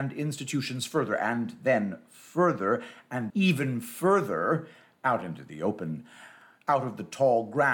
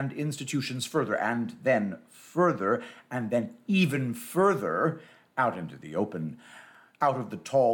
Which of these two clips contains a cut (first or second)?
first